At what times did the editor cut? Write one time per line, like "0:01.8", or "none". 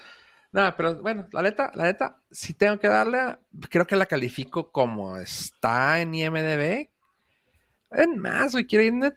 none